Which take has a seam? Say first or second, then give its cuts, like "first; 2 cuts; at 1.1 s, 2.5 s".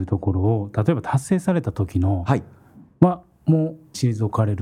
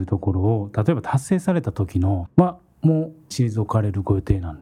second; 1 cut; at 2.3 s